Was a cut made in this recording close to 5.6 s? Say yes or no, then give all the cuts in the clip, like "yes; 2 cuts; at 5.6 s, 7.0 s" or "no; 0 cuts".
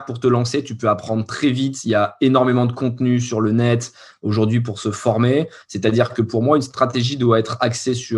yes; 1 cut; at 5.6 s